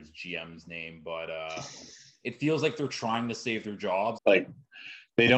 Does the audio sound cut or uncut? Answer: cut